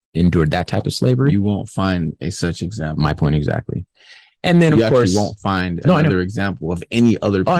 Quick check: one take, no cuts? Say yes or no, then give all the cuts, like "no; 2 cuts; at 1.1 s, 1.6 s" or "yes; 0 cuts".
yes; 0 cuts